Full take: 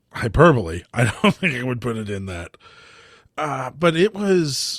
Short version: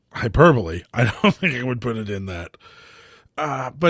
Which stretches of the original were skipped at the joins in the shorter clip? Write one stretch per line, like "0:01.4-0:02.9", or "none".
none